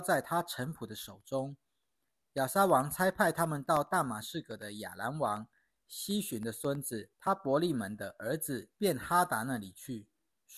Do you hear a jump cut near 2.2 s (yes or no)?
no